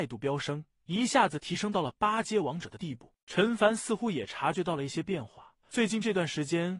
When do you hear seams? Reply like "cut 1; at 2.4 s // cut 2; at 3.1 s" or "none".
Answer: cut 1; at 3.2 s // cut 2; at 5.6 s